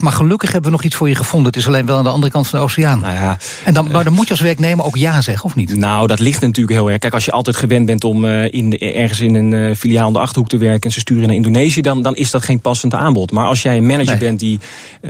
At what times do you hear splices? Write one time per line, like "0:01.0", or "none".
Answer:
none